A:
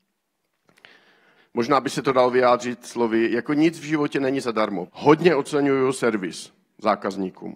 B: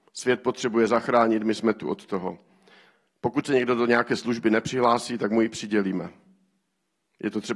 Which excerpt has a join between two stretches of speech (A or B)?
A